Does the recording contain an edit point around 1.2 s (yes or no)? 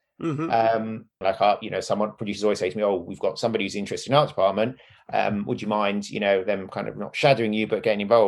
yes